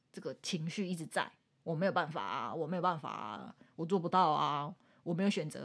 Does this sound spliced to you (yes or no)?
no